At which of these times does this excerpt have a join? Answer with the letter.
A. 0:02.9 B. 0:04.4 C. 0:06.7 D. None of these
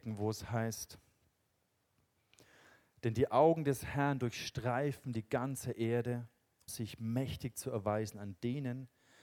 C